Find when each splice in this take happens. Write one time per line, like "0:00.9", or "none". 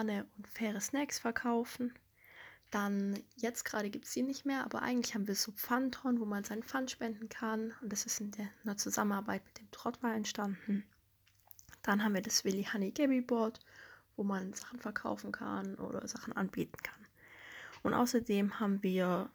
0:02.6